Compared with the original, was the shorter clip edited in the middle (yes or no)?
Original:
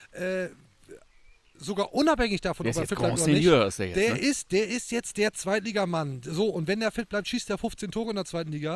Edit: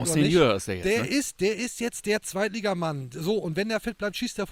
no